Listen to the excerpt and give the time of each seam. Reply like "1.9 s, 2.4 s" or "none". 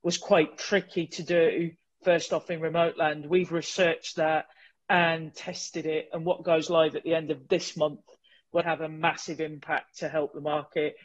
8.6 s